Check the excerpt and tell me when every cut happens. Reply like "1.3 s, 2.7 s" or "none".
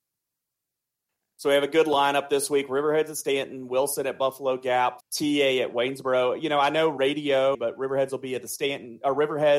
5.0 s, 7.5 s